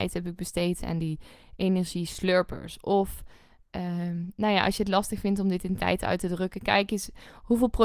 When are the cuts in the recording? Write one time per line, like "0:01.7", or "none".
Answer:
none